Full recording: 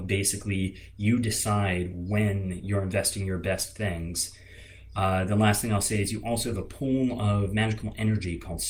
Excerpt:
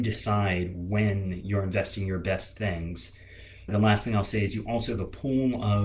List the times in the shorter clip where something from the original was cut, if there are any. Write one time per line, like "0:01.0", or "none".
0:03.7